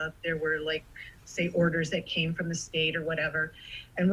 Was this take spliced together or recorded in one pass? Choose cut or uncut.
cut